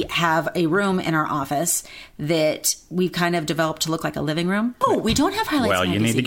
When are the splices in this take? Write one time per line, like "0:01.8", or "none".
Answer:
0:04.8